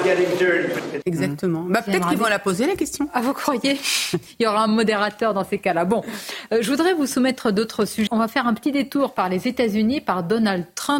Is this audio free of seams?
no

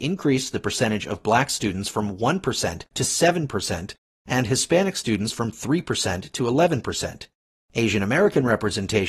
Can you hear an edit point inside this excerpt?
no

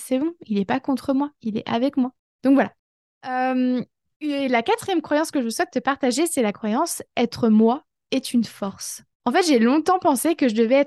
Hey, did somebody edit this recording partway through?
yes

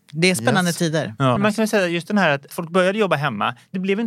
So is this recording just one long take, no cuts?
no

